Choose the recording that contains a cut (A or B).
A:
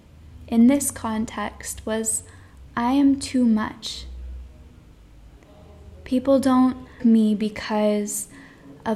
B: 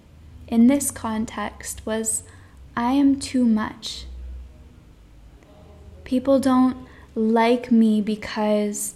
A